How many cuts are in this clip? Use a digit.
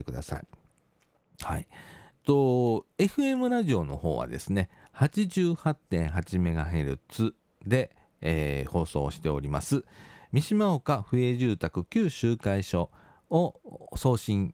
1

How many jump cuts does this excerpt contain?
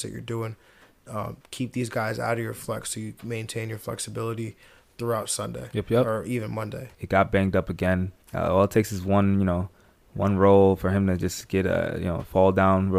2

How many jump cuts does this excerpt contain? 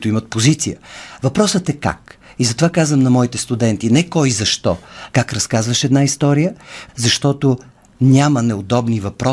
2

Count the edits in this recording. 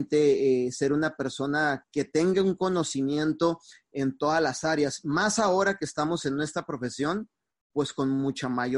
1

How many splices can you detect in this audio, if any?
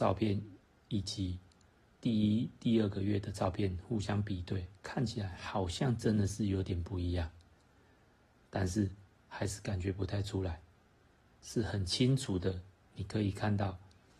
1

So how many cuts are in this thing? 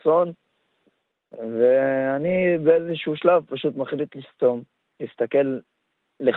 0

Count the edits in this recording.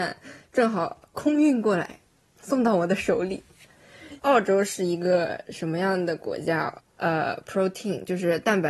2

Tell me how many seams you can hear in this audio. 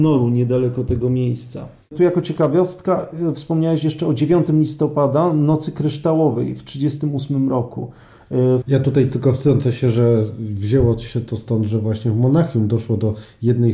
1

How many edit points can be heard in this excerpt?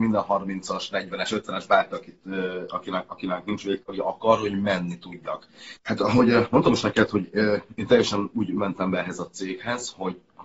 1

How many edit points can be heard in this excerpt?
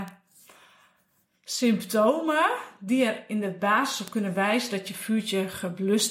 0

